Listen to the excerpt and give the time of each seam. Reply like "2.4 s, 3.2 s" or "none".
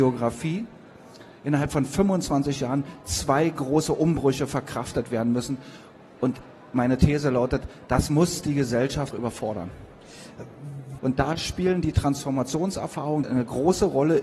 9.1 s, 11.0 s, 13.2 s